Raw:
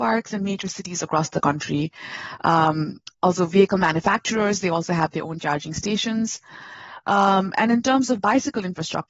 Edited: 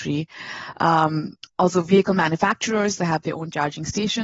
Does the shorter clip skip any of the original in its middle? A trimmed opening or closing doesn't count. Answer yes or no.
yes